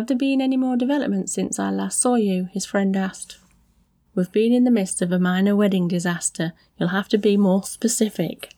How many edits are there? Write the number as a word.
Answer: one